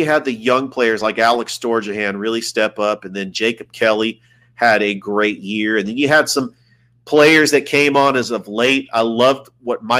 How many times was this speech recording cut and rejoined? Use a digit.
0